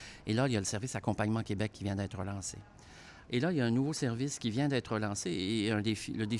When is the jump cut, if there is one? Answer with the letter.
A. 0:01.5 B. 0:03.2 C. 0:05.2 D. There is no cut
B